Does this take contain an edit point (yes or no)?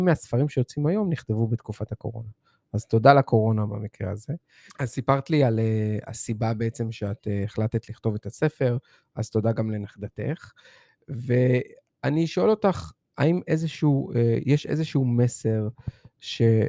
yes